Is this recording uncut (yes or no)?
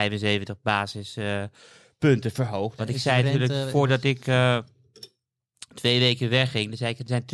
no